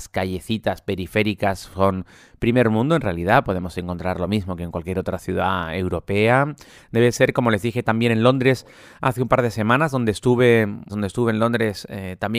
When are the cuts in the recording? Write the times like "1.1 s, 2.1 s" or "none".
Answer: 6.8 s, 10.9 s